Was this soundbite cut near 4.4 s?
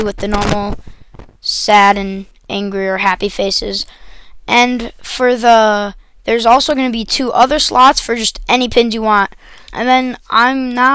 no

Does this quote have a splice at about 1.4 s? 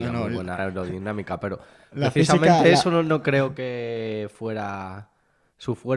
no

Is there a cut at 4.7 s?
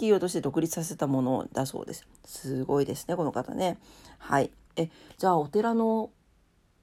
yes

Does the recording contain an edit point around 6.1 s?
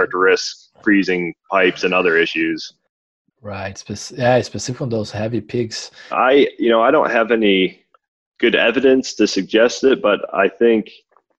yes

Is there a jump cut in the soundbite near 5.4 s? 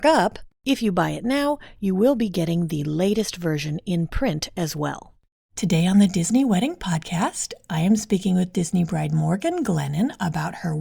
yes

